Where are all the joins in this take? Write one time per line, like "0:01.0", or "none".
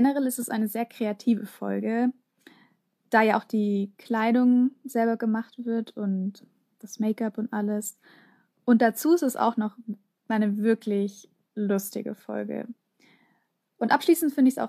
none